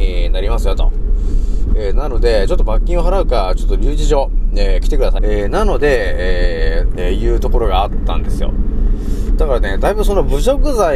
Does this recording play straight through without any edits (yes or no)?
no